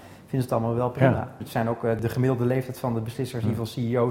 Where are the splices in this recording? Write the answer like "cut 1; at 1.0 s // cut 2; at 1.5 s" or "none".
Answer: cut 1; at 1.4 s